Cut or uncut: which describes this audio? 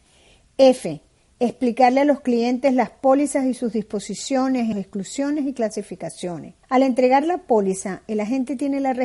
cut